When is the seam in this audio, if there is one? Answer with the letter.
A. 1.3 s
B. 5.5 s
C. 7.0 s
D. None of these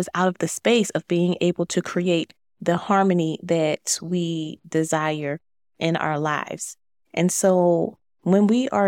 C